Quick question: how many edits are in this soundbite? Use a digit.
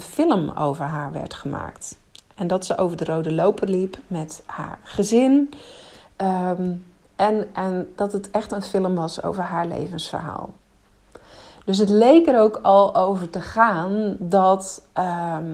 0